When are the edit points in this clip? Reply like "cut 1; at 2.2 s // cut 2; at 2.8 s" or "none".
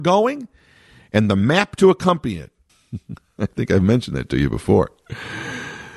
cut 1; at 2.7 s